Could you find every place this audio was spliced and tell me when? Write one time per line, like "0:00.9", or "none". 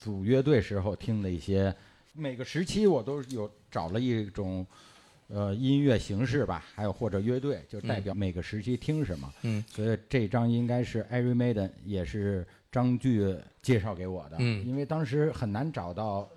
0:08.1
0:13.5